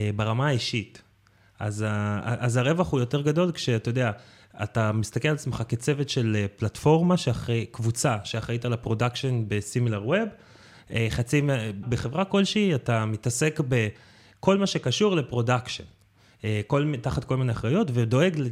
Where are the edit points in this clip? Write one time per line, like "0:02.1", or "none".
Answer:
0:11.8